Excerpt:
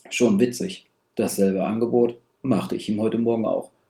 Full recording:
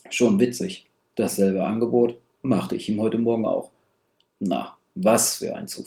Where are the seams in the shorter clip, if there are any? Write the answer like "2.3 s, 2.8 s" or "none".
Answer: none